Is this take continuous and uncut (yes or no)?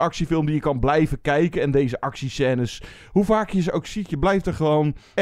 yes